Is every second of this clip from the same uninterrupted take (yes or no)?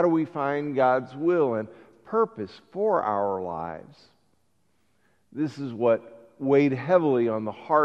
yes